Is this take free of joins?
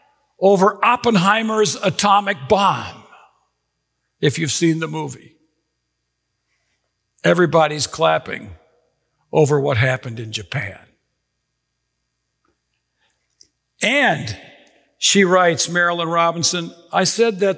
yes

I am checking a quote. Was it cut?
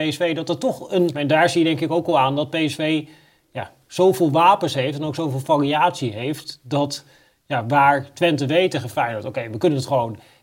yes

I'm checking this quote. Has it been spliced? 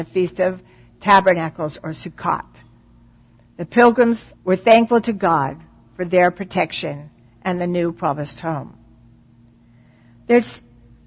yes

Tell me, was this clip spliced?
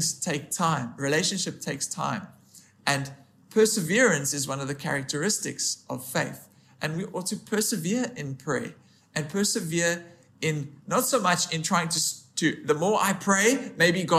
no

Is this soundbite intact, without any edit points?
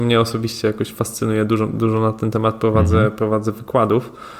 yes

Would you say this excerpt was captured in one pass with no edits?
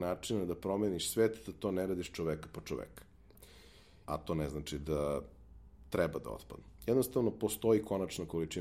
no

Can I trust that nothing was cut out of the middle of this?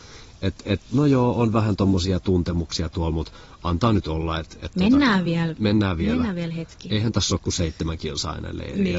yes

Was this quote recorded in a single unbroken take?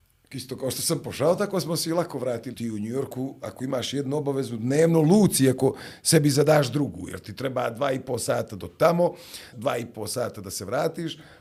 no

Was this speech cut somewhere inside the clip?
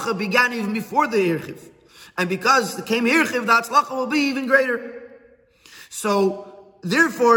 no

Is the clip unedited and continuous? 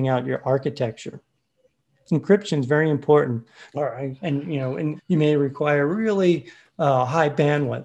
no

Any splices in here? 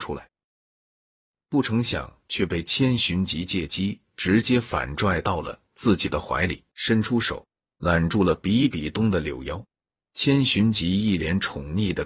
yes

